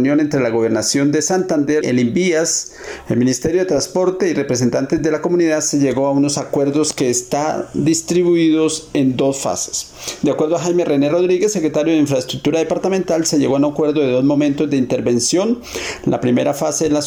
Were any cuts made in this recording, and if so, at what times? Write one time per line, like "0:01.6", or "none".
0:01.8

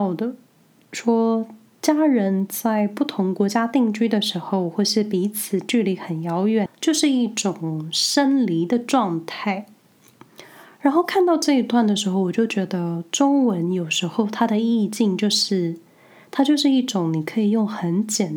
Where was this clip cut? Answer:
0:06.7

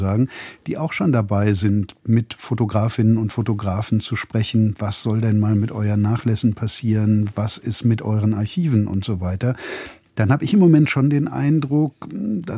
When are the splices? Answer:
none

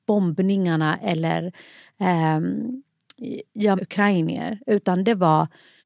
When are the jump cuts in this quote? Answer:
0:03.8

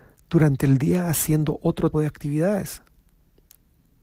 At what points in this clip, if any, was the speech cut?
0:01.9

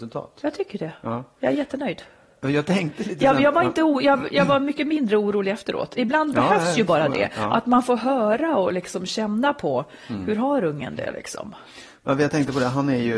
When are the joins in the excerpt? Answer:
none

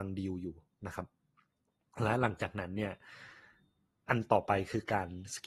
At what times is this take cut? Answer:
none

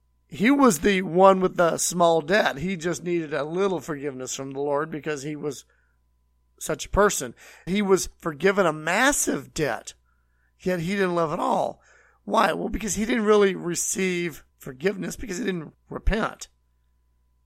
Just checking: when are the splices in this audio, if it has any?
0:07.7
0:14.5
0:15.7

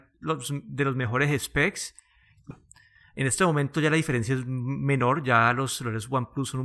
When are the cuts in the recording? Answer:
0:02.5

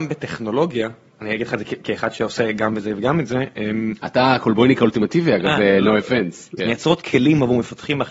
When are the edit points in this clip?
0:06.6

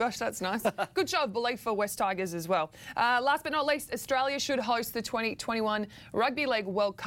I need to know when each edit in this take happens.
none

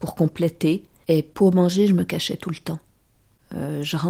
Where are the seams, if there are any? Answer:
0:01.0

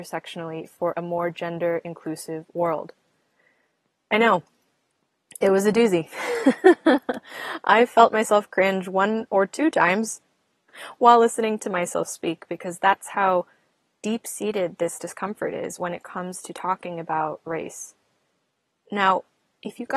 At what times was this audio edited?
0:10.7

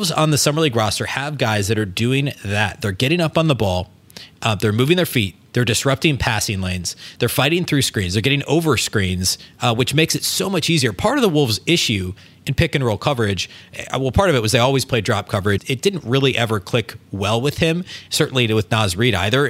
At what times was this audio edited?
0:15.6

